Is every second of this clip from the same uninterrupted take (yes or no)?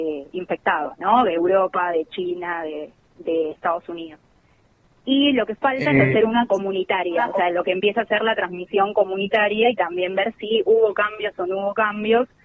yes